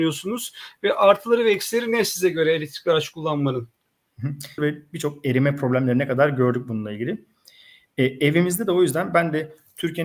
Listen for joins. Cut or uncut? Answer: cut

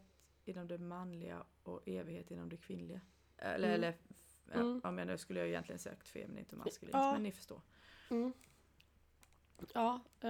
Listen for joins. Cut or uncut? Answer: uncut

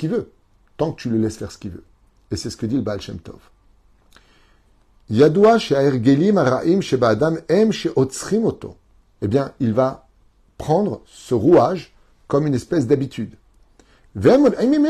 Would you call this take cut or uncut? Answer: cut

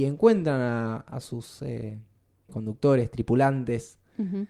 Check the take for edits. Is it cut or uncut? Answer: cut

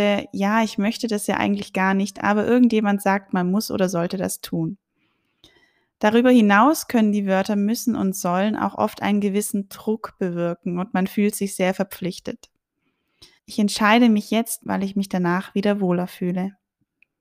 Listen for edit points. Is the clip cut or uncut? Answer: cut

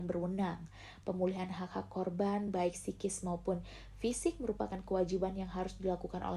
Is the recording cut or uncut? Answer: uncut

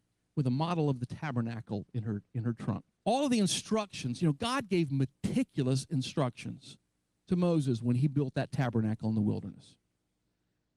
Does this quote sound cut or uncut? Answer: cut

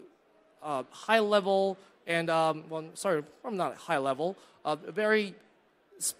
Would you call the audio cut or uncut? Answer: uncut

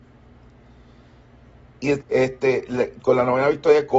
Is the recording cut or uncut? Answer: cut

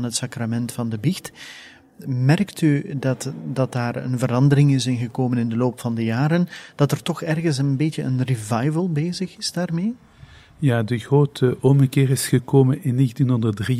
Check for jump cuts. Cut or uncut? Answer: uncut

